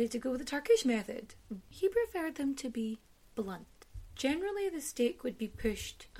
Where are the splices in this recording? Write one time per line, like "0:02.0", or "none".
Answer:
0:01.6